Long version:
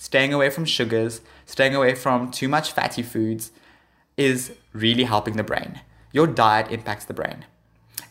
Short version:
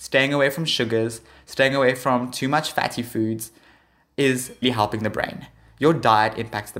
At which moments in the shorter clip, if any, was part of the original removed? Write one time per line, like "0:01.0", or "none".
0:04.6